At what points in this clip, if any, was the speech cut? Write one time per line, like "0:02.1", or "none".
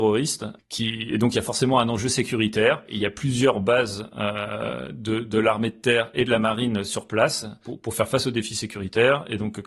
none

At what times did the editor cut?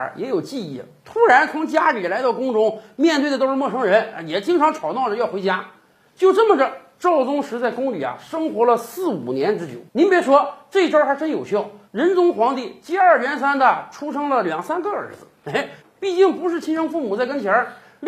0:09.9
0:11.9
0:15.8

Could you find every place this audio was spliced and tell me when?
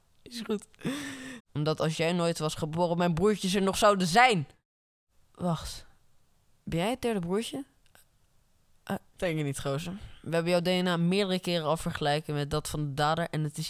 0:01.4
0:09.1

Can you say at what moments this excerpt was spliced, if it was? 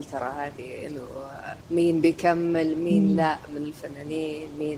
0:01.6

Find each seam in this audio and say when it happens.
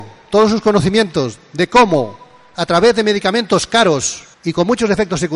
0:04.3

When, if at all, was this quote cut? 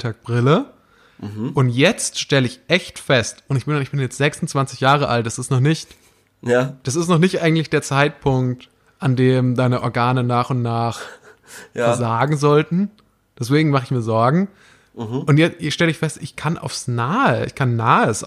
none

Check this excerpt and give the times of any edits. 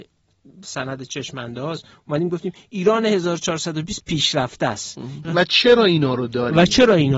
0:05.2

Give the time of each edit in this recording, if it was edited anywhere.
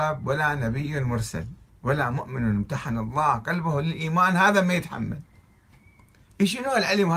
none

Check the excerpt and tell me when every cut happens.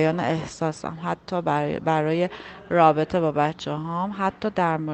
none

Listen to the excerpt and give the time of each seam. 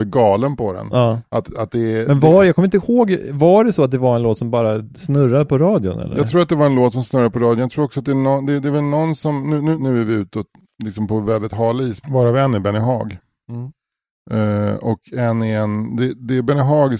0:12.0

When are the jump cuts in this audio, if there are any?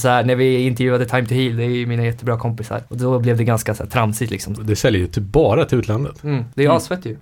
0:04.6

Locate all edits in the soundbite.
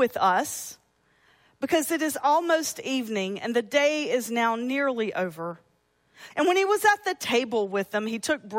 0:06.3

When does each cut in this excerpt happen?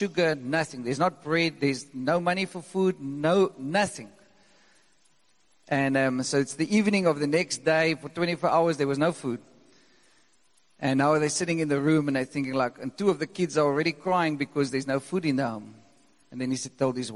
none

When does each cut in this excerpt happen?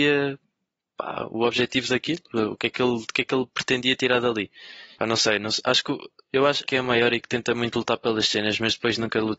0:04.9
0:06.6

